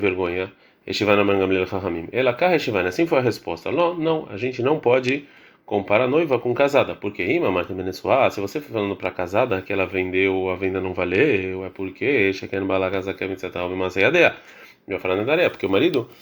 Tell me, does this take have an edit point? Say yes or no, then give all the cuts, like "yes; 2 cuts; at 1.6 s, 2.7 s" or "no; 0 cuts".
no; 0 cuts